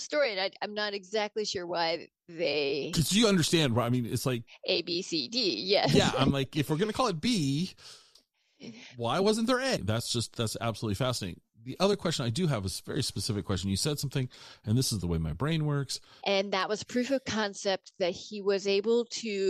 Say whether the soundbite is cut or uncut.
cut